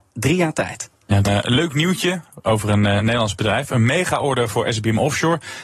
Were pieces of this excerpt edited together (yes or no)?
yes